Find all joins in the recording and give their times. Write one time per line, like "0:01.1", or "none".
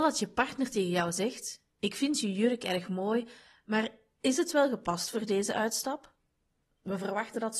0:06.6